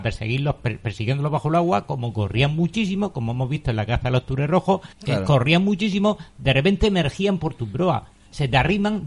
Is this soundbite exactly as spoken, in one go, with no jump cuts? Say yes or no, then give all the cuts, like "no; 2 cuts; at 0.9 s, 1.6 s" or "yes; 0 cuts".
no; 1 cut; at 4.9 s